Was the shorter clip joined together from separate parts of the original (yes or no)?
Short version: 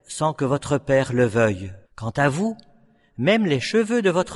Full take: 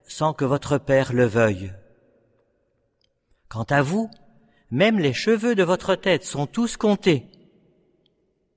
yes